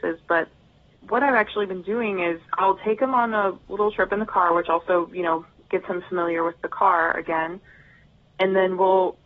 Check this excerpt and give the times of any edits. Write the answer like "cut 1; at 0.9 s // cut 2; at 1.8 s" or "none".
cut 1; at 2.4 s